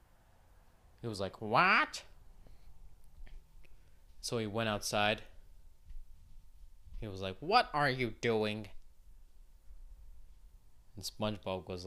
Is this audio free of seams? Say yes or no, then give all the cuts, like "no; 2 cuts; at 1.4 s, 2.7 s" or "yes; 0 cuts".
yes; 0 cuts